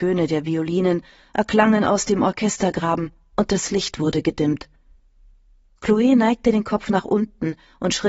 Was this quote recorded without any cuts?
yes; 0 cuts

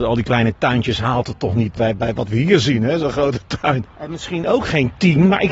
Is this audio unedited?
no; 2 cuts; at 1.7 s, 3.8 s

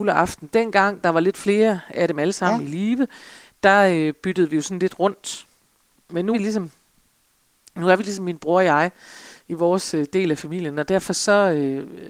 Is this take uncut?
no; 1 cut; at 6.3 s

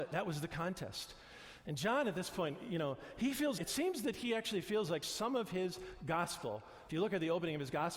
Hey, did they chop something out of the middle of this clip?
yes; 1 cut; at 3.6 s

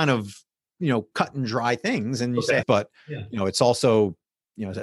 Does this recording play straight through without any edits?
no; 1 cut; at 2.6 s

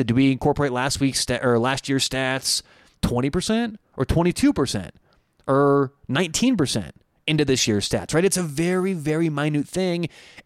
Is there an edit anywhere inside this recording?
no; 0 cuts

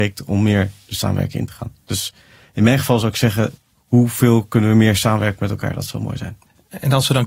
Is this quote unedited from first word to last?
yes; 0 cuts

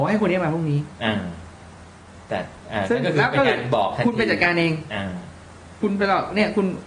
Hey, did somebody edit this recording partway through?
no; 0 cuts

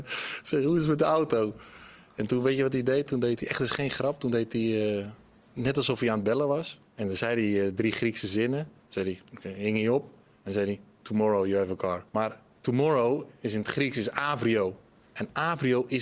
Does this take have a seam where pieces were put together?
yes; 2 cuts; at 6.9 s, 12.1 s

